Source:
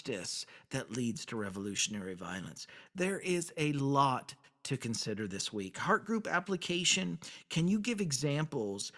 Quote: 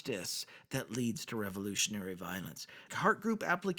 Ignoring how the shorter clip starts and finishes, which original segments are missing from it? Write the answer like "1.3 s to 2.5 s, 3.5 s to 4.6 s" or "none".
2.9 s to 5.7 s